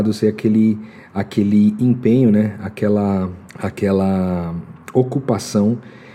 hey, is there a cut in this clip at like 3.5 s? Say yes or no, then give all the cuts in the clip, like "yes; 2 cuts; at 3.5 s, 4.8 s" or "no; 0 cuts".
yes; 1 cut; at 3.5 s